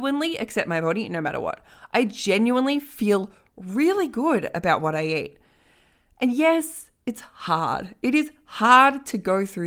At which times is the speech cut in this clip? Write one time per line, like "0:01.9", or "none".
none